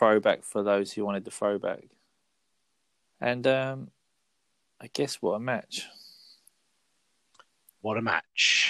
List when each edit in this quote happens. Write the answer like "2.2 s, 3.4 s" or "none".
3.0 s